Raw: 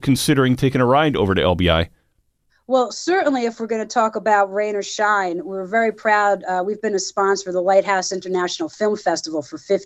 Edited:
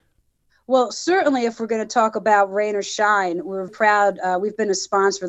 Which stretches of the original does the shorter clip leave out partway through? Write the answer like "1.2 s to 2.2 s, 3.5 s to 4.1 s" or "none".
5.7 s to 5.9 s

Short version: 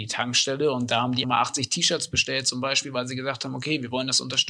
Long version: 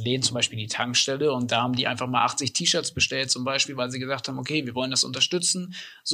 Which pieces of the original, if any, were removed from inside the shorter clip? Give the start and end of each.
1.8 s to 2.1 s

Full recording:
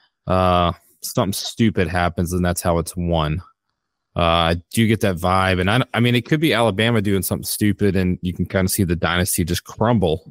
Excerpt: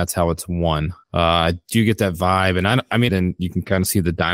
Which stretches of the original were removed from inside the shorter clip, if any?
3.5 s to 4.1 s, 6.1 s to 7.9 s

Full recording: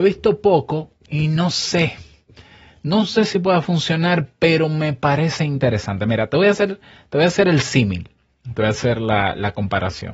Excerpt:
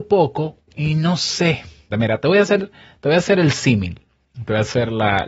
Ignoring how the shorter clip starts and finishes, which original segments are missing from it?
2.2 s to 6.0 s

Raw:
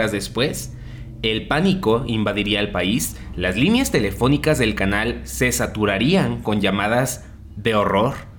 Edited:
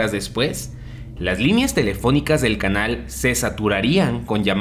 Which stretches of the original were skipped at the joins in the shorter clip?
1.2 s to 3.3 s

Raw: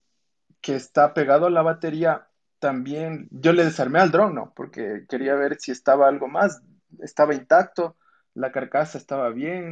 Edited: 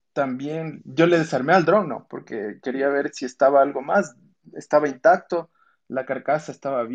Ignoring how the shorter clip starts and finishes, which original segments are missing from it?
none

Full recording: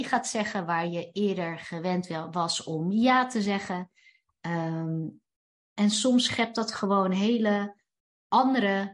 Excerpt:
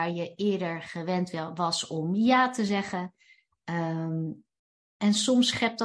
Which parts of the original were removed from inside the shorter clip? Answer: none

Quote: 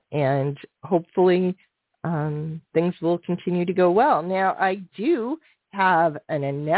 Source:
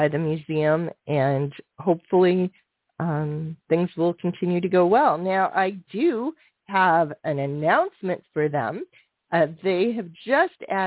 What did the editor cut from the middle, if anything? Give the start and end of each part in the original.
none

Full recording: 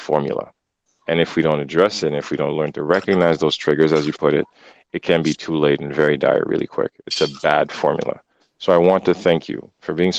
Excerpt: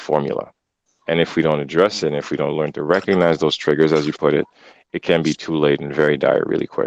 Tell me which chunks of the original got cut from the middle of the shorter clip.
none

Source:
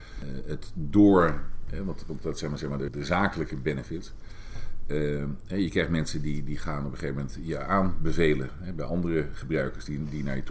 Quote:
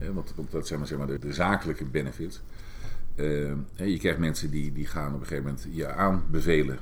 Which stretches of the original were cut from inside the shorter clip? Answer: none

